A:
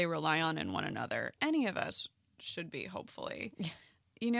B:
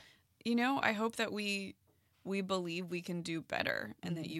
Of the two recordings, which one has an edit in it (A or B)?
A